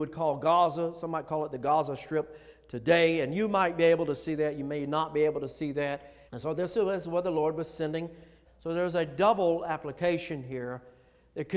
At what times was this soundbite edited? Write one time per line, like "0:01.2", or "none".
0:06.3
0:08.4

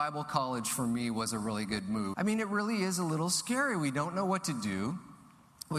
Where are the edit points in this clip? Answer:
0:02.1

